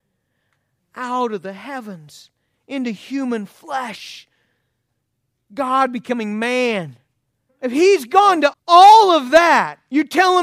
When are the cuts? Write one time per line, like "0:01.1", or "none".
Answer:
0:07.5
0:08.5